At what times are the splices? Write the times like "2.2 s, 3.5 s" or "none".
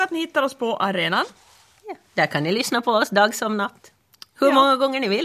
none